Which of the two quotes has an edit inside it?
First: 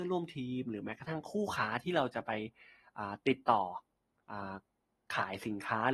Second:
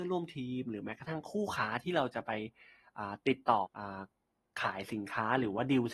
second; 1 cut; at 3.6 s

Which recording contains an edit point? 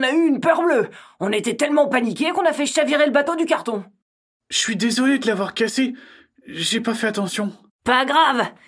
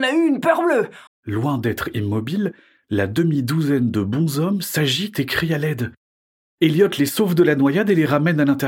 second; 1 cut; at 1.1 s

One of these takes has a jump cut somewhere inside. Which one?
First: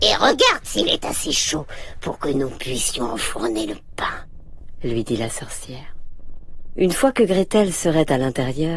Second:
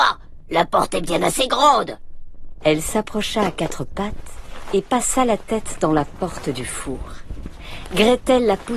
second; 1 cut; at 2.6 s

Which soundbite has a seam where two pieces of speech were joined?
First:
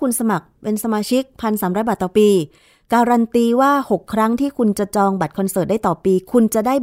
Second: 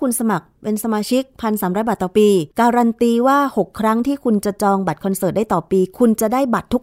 second; 1 cut; at 2.5 s

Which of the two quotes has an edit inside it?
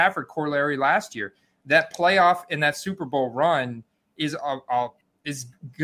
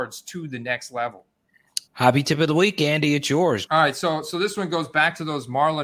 second; 2 cuts; at 1.9 s, 3.7 s

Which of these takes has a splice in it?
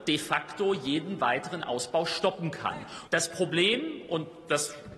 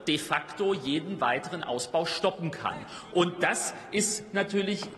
first; 1 cut; at 3.0 s

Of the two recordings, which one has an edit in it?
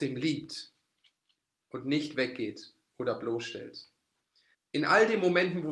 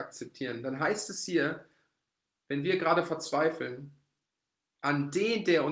first; 1 cut; at 4.5 s

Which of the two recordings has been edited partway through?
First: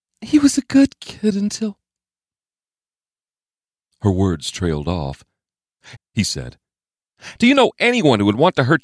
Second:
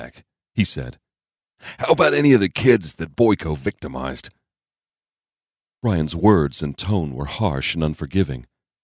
first; 2 cuts; at 6.0 s, 7.4 s

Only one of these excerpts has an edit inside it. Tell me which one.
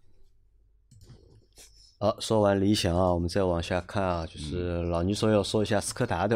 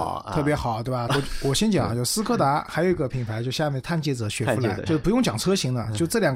second; 2 cuts; at 1.1 s, 4.9 s

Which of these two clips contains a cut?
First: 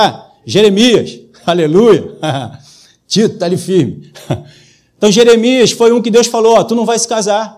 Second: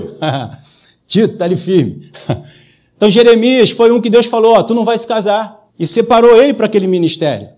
second; 1 cut; at 5.7 s

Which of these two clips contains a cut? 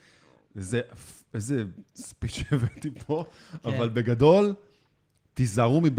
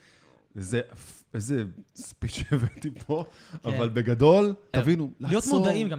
second; 1 cut; at 4.7 s

